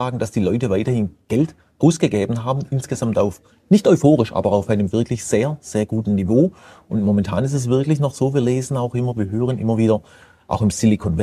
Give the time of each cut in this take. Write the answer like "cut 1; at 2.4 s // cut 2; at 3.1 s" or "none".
none